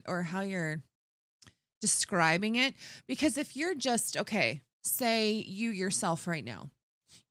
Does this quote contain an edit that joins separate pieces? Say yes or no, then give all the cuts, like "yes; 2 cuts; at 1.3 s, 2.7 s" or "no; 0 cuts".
no; 0 cuts